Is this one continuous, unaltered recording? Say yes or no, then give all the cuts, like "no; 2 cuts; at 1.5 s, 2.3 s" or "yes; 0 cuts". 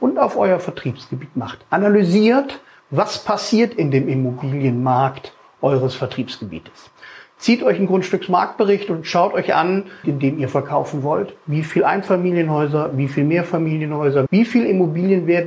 no; 2 cuts; at 10.0 s, 14.3 s